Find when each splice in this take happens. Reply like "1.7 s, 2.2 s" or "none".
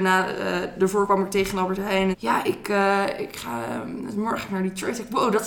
2.1 s